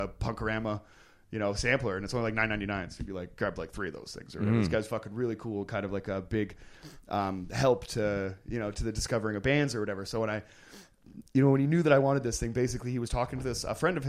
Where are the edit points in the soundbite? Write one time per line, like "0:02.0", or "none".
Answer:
none